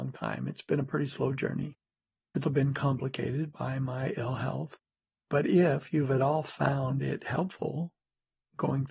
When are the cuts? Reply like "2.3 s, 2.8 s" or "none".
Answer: 2.4 s